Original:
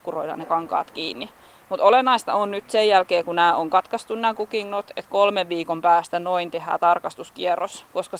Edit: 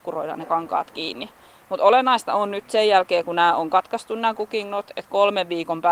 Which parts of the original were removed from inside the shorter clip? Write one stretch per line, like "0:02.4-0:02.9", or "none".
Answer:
none